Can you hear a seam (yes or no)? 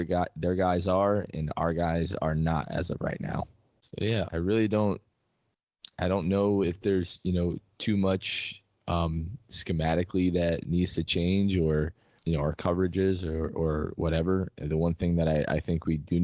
yes